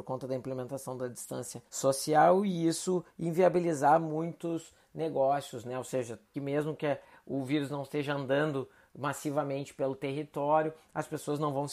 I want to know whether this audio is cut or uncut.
cut